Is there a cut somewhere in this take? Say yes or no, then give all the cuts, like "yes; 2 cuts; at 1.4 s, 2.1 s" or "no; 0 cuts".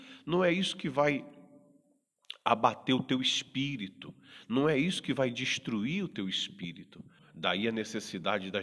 yes; 1 cut; at 7.2 s